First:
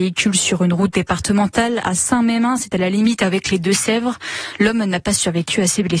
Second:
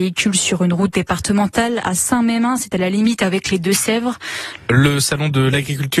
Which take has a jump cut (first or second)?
second